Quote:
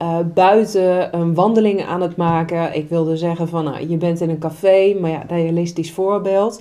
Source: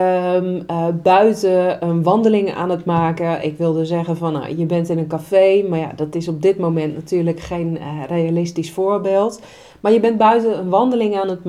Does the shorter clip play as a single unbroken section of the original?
no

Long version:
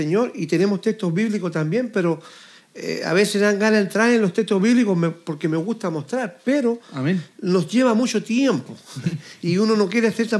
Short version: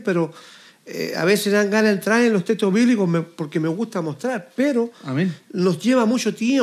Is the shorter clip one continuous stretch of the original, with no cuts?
yes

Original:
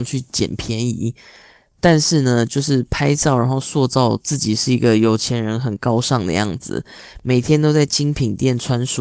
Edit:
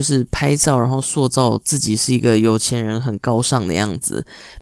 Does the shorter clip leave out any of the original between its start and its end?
no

